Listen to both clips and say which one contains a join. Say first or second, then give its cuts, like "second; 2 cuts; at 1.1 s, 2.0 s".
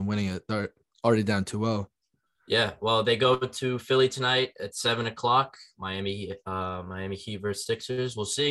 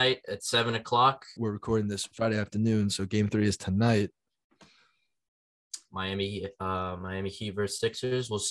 second; 2 cuts; at 1.4 s, 5.9 s